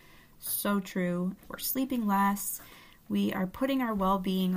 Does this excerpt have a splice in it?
yes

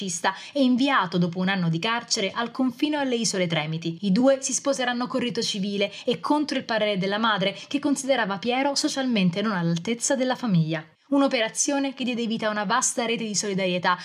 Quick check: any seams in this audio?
yes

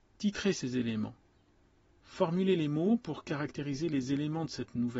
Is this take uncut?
yes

